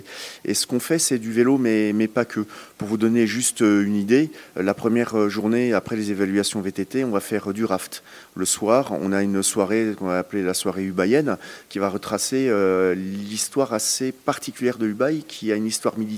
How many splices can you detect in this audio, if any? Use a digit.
0